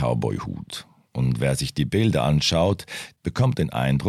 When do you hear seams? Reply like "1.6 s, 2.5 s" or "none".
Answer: 3.1 s